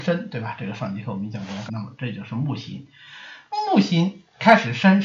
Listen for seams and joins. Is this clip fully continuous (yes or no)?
no